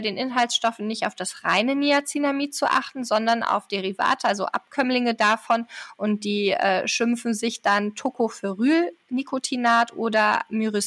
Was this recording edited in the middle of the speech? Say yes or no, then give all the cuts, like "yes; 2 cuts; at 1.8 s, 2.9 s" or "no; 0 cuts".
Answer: no; 0 cuts